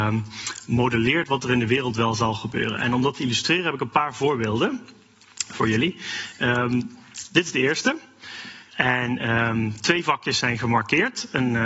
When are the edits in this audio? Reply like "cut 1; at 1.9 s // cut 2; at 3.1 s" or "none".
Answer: cut 1; at 8.7 s